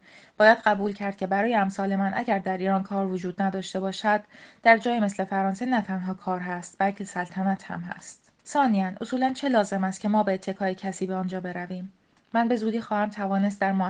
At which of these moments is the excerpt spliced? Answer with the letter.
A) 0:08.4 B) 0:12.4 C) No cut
A